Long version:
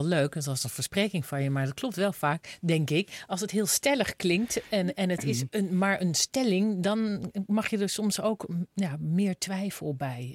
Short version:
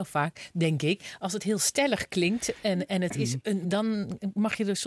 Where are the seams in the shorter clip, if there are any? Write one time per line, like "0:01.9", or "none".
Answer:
0:03.6

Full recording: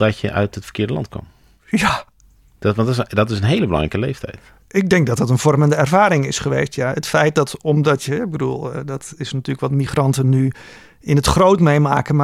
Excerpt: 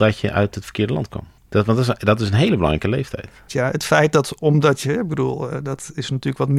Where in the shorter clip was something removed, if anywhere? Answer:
0:01.4
0:03.5

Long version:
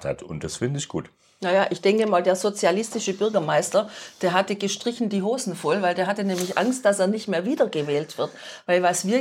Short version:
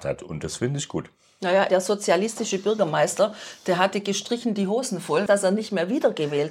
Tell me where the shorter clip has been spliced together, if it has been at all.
0:01.7
0:05.3

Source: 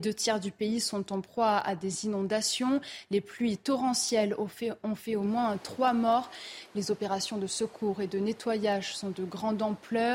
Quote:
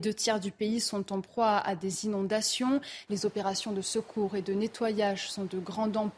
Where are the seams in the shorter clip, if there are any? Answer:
0:03.1

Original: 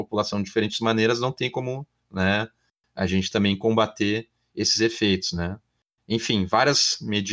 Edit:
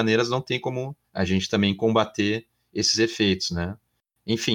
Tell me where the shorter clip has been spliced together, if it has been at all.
0:01.0

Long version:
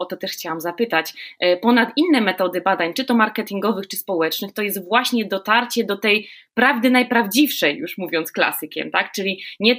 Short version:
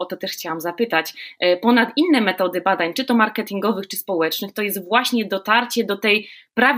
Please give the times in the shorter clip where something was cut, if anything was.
none

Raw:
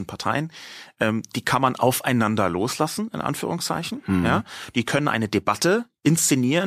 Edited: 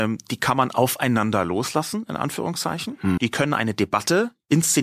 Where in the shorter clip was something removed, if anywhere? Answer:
0:03.2

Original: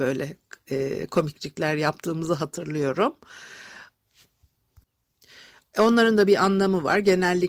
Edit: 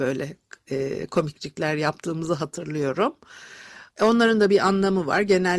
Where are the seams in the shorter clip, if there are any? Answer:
0:03.9

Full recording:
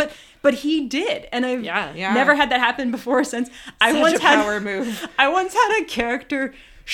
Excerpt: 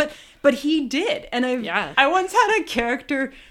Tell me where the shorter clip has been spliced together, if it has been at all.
0:01.9

